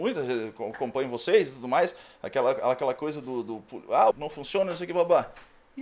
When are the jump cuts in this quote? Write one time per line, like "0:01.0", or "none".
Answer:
0:04.1